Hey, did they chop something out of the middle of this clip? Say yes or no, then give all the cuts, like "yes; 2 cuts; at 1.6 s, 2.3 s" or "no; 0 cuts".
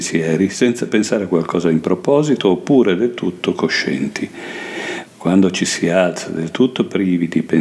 yes; 1 cut; at 5.1 s